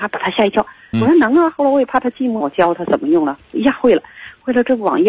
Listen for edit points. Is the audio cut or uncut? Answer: cut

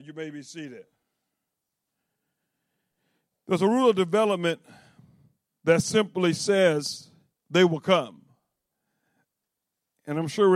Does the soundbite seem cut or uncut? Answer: cut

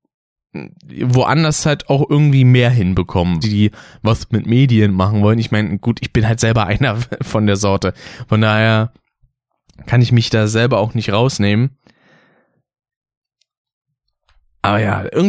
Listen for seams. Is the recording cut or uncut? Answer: cut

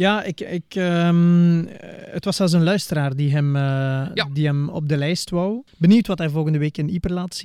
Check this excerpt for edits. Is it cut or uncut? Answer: cut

